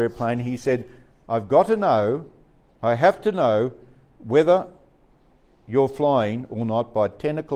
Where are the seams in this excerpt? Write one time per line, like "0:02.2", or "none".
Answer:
none